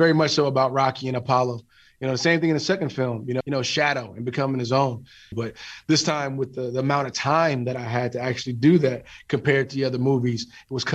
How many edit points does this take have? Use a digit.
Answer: 2